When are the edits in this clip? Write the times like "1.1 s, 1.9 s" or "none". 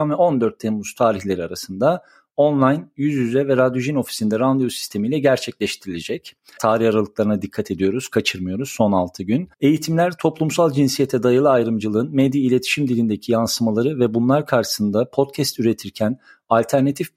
6.6 s, 9.5 s